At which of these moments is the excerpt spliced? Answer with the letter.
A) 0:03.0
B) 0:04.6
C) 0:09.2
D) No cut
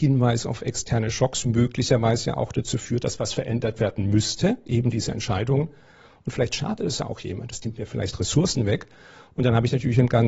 D